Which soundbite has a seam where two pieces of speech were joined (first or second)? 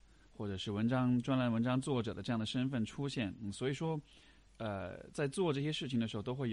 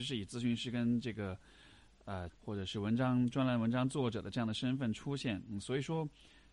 second